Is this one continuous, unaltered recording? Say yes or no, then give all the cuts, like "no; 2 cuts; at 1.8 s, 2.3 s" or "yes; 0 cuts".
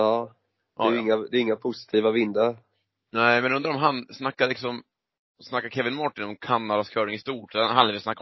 yes; 0 cuts